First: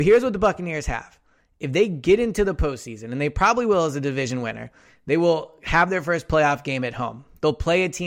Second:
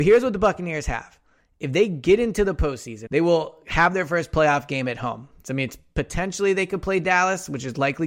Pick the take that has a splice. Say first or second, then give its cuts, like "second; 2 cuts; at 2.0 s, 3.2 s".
second; 2 cuts; at 3.1 s, 5.4 s